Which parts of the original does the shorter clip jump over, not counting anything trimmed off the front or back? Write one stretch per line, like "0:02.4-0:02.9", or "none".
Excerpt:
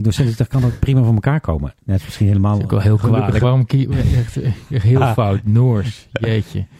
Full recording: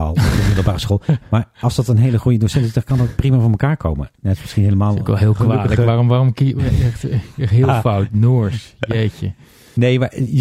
0:05.8-0:06.1